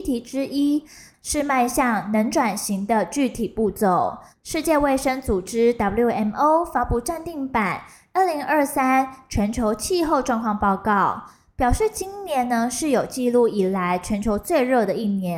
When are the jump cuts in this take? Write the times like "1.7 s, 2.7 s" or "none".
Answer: 4.3 s